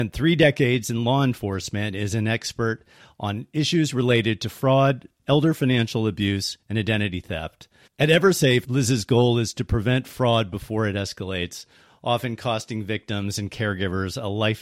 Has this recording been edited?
yes; 1 cut; at 7.9 s

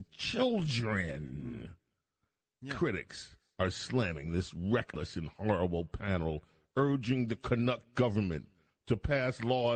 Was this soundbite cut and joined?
no; 0 cuts

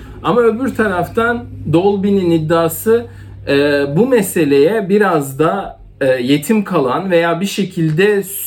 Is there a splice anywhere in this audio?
no; 0 cuts

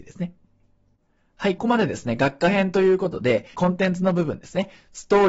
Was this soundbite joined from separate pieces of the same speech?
yes; 2 cuts; at 1.6 s, 3.5 s

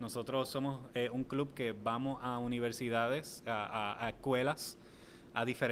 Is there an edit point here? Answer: no; 0 cuts

